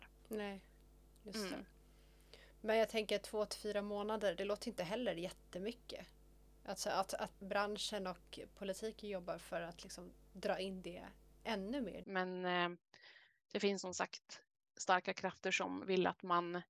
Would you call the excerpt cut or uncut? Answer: cut